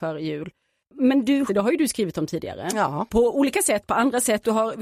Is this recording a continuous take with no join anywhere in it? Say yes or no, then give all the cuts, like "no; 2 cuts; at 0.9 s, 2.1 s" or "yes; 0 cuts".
no; 1 cut; at 1.5 s